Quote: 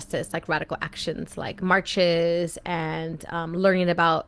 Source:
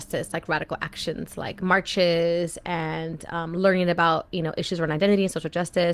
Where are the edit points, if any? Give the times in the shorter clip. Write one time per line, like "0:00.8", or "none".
none